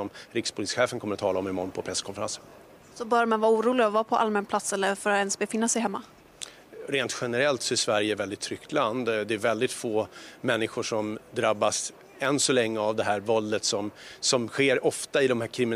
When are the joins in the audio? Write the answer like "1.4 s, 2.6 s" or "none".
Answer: none